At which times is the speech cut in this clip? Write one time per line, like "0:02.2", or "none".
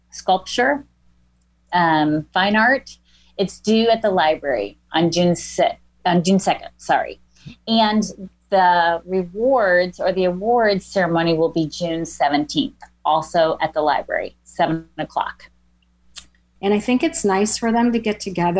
0:16.6